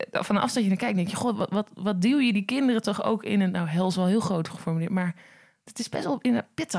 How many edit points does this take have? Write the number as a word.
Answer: zero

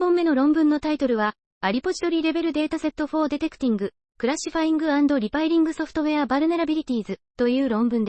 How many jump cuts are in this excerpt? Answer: zero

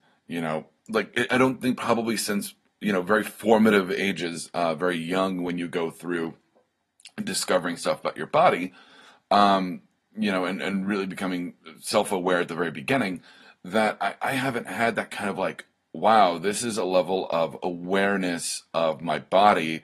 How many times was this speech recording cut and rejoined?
one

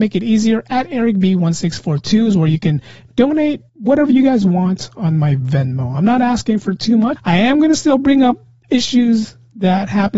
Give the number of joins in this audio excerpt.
two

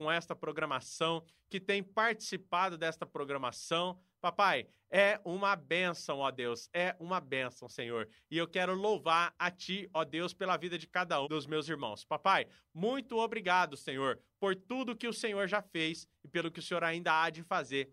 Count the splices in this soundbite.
one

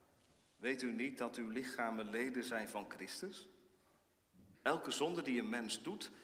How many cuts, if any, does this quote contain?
one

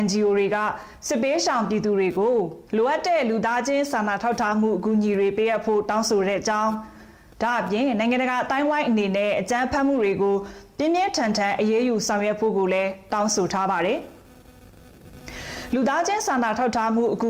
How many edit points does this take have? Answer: one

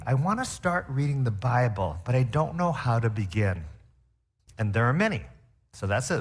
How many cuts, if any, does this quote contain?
one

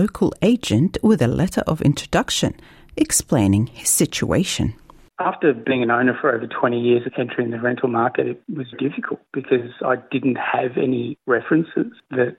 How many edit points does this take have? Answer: two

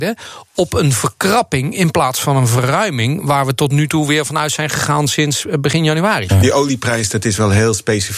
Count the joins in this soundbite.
one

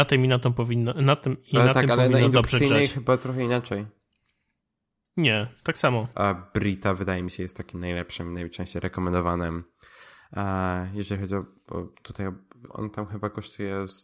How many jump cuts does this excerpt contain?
two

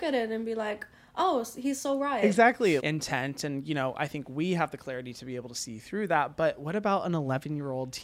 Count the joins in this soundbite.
one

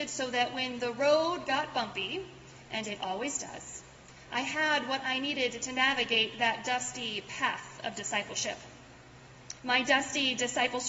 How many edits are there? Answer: one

